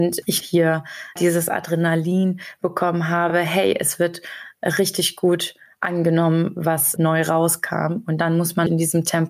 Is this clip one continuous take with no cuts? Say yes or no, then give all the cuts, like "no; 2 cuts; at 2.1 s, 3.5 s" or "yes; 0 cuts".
yes; 0 cuts